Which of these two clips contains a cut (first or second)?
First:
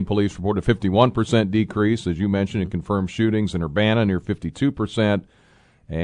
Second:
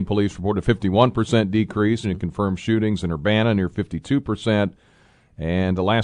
second